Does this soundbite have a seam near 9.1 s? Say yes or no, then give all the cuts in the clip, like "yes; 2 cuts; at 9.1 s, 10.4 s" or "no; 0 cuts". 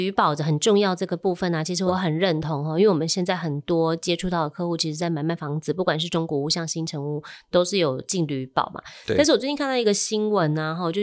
no; 0 cuts